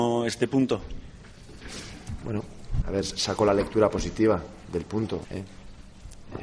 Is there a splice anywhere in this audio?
yes; 2 cuts; at 2.8 s, 5.2 s

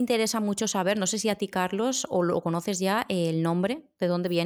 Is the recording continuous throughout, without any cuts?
yes; 0 cuts

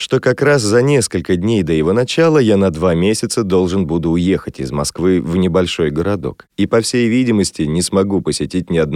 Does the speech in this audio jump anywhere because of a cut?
no; 0 cuts

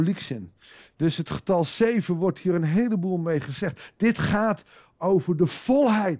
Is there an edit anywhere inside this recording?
no; 0 cuts

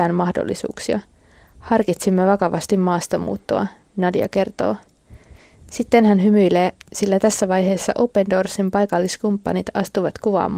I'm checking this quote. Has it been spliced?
no; 0 cuts

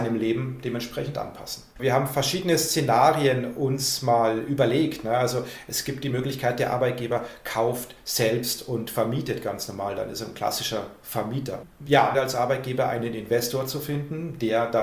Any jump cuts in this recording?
yes; 2 cuts; at 1.8 s, 12.1 s

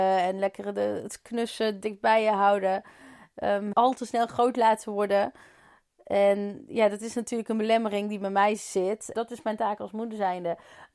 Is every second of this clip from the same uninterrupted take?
no; 2 cuts; at 3.7 s, 9.1 s

